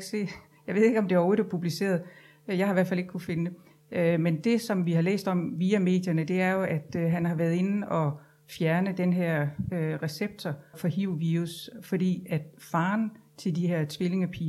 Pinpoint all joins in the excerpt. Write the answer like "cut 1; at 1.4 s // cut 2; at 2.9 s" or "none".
cut 1; at 10.7 s